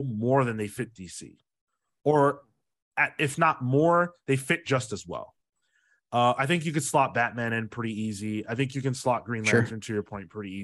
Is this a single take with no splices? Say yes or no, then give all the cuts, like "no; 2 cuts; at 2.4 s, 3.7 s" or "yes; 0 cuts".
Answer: yes; 0 cuts